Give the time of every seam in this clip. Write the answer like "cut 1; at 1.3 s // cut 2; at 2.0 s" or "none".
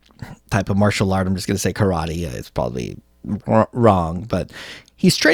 none

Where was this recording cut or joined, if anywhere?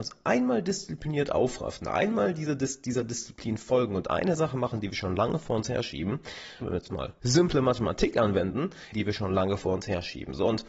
cut 1; at 6.6 s // cut 2; at 8.9 s

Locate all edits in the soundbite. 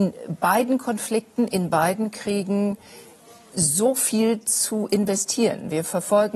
none

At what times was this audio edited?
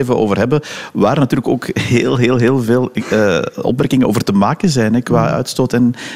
none

